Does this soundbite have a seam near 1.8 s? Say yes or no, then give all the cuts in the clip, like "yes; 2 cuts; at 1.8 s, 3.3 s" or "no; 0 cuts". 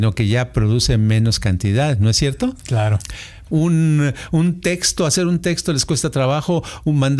no; 1 cut; at 3.5 s